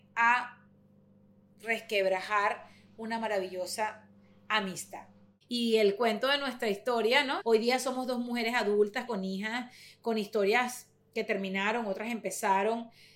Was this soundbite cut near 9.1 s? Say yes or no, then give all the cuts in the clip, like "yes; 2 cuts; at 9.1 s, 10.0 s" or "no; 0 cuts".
yes; 2 cuts; at 7.4 s, 9.1 s